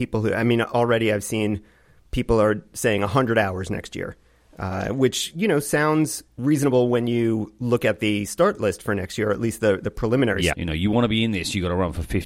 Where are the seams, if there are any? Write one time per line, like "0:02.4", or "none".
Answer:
0:10.5